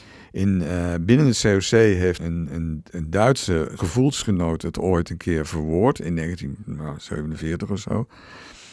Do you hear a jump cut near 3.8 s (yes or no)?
no